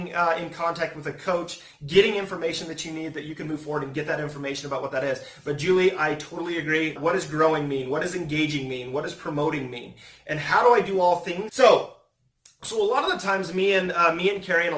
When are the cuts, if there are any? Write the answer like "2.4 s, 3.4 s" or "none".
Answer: 7.0 s, 11.5 s